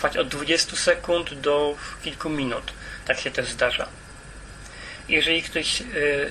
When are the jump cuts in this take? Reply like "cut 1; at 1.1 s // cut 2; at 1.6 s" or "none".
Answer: cut 1; at 3.0 s // cut 2; at 5.0 s